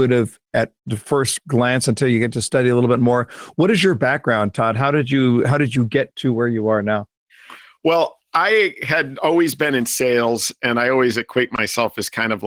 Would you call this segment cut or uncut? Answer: uncut